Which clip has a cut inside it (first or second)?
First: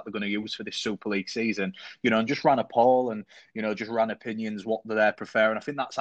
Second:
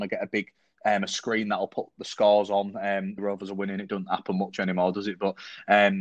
second